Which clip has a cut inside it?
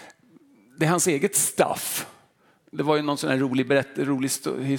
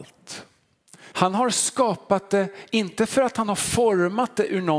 second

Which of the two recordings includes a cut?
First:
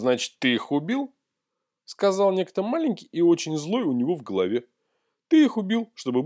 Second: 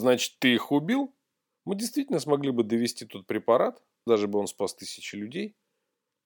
second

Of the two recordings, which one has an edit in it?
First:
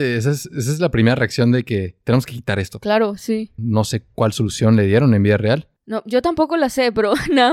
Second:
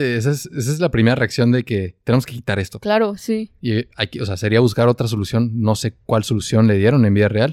first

